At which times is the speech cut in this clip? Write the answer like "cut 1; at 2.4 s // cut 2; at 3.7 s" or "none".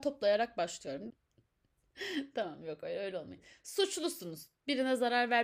cut 1; at 1.1 s